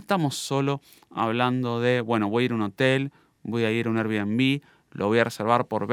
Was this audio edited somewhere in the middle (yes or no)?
no